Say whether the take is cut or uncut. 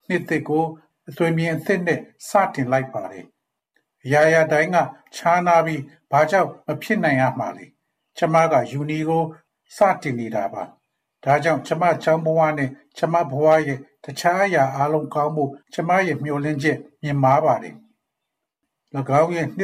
cut